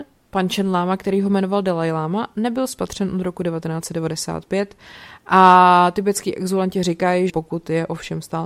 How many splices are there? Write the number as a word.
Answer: one